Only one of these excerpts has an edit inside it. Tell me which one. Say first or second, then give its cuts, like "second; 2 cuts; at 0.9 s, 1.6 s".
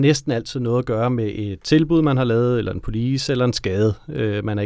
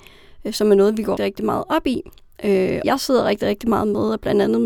second; 2 cuts; at 1.2 s, 2.8 s